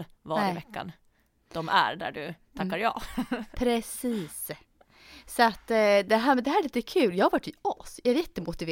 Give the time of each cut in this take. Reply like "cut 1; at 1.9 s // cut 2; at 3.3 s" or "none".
none